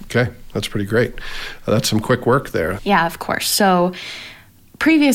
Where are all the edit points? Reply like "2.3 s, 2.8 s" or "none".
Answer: 2.8 s